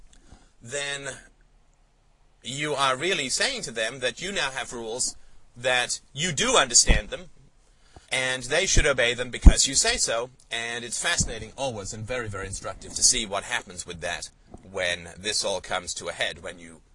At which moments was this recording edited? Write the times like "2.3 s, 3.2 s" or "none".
8.0 s